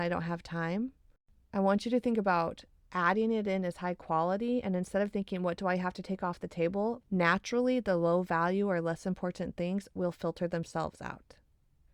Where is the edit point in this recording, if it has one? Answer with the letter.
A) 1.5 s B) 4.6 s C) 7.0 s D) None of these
C